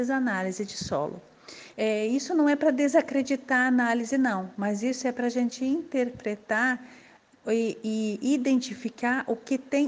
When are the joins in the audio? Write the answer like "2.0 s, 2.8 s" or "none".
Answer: 1.7 s